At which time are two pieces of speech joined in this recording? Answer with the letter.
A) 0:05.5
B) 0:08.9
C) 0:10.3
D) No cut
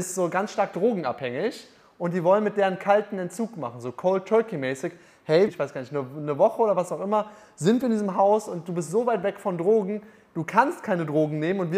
A